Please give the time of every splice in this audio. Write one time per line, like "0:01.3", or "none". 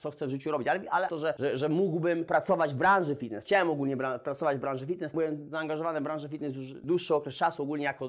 0:01.1
0:05.1